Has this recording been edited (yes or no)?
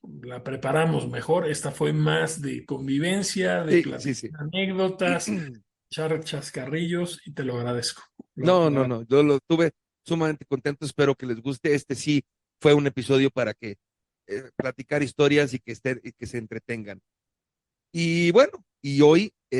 yes